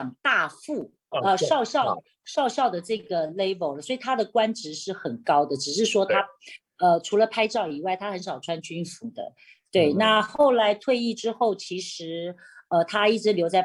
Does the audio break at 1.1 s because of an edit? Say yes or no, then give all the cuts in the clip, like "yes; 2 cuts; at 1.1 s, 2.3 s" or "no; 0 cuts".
yes; 1 cut; at 1.1 s